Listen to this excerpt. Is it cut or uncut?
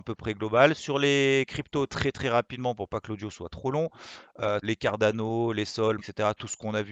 cut